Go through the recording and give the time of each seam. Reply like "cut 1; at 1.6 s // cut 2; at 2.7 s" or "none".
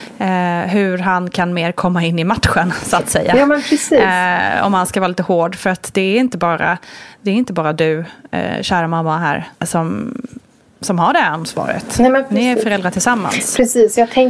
cut 1; at 9.5 s